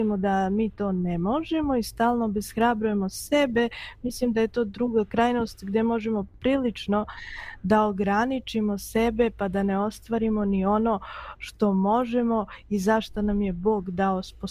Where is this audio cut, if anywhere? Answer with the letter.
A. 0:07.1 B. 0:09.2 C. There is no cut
C